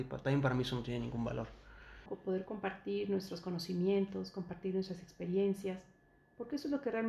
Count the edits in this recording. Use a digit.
1